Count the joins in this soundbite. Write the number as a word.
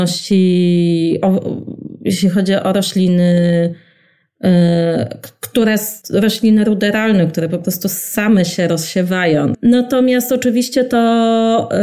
two